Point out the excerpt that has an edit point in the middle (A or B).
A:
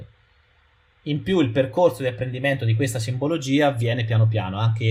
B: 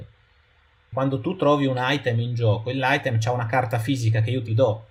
B